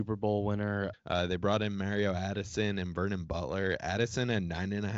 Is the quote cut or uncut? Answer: cut